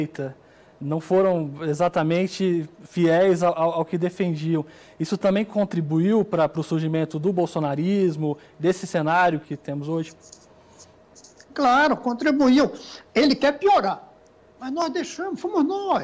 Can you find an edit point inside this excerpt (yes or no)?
yes